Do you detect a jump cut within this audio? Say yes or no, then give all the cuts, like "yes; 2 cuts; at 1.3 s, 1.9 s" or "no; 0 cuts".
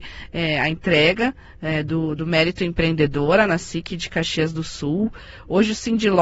no; 0 cuts